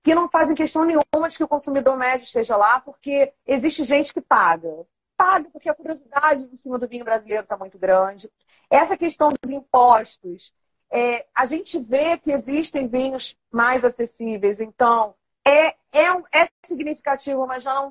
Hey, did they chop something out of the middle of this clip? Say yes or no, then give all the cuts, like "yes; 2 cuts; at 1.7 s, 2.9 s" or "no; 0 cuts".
no; 0 cuts